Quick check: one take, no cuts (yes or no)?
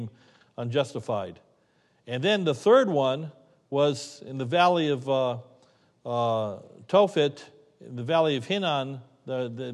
yes